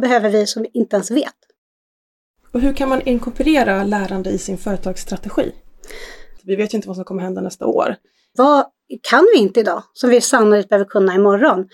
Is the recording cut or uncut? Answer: cut